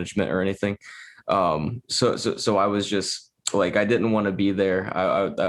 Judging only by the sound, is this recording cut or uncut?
uncut